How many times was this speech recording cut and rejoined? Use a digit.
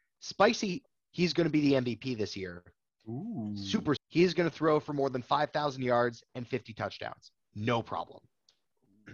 2